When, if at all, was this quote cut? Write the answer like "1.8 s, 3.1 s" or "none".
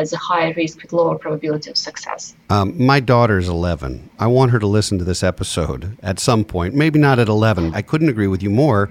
2.4 s, 4.1 s, 7.7 s

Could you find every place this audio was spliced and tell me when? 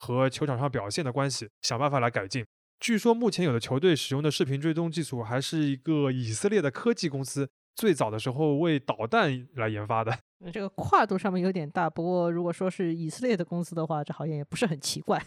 none

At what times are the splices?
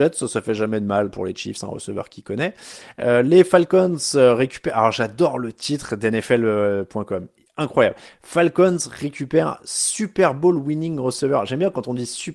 none

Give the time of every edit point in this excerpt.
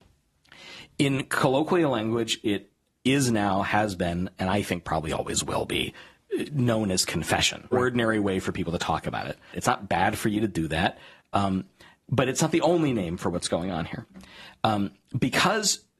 7.7 s, 9.5 s

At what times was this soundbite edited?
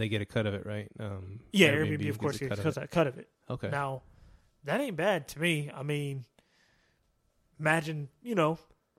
none

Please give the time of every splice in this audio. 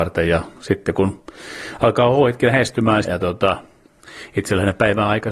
3.0 s

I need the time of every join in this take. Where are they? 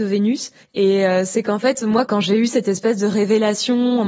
2.1 s

